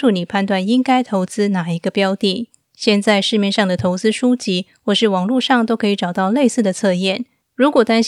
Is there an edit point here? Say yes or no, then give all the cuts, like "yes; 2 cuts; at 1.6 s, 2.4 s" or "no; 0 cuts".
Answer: no; 0 cuts